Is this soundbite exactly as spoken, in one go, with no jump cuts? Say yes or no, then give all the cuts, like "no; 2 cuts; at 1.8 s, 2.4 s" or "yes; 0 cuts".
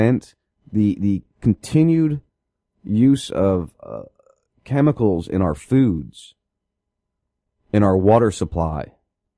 yes; 0 cuts